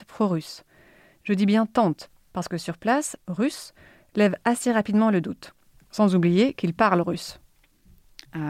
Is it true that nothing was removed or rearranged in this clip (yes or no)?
no